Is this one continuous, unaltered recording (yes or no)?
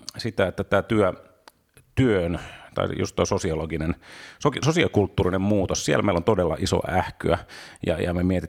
yes